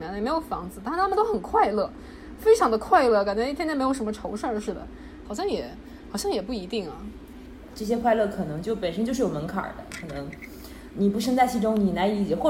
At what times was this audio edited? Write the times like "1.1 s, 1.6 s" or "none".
5.2 s, 7.7 s